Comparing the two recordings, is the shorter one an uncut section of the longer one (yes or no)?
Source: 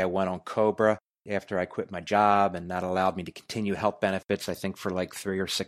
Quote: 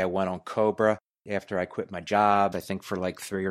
no